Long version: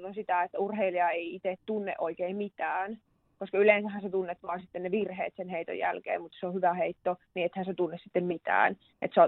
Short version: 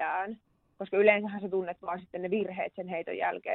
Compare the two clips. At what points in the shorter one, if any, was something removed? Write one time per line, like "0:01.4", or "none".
none